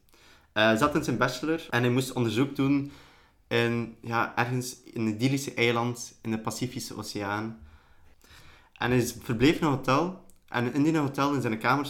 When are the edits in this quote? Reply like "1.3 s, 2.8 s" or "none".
none